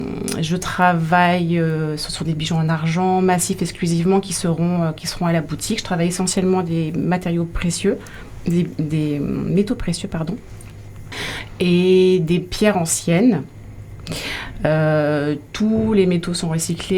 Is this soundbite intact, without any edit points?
yes; 0 cuts

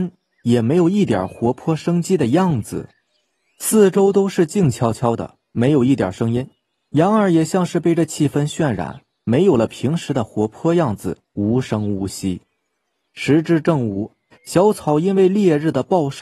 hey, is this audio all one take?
no; 3 cuts; at 11.2 s, 13.1 s, 14.3 s

